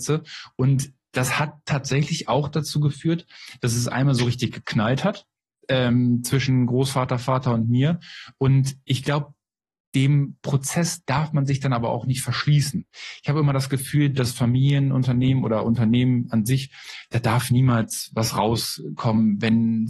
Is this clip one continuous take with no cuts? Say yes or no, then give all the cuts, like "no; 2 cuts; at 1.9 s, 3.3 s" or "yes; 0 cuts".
yes; 0 cuts